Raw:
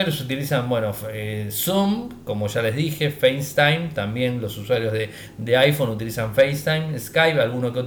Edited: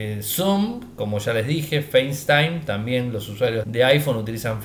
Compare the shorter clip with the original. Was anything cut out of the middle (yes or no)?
yes